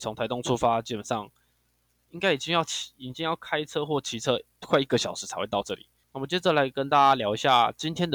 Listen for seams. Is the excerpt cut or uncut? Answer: cut